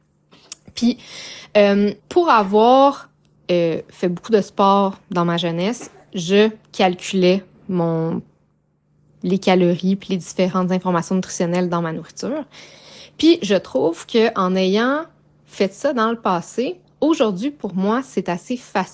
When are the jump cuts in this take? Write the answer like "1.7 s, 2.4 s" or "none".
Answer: 2.0 s